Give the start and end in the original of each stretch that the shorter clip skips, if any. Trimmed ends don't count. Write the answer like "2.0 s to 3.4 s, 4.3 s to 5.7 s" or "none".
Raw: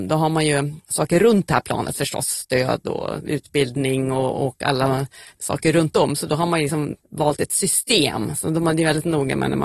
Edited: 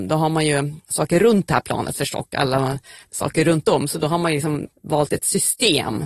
2.2 s to 4.5 s